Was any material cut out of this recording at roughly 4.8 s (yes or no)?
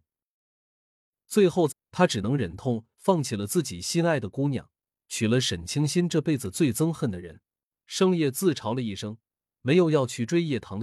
no